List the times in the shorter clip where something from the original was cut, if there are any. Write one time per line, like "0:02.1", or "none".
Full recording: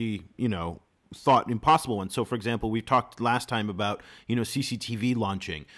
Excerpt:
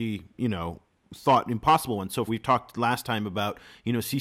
0:02.3